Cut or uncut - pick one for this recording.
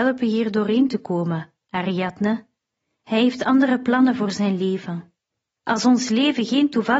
cut